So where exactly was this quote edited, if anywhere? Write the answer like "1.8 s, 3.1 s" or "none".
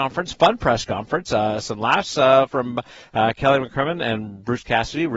none